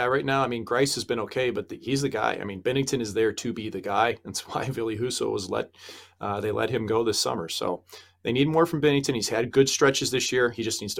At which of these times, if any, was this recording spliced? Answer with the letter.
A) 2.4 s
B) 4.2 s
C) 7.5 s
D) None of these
D